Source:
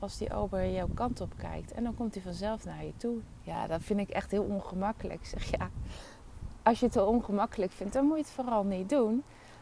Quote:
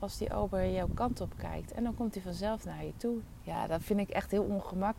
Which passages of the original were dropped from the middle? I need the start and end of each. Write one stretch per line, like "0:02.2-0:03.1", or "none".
none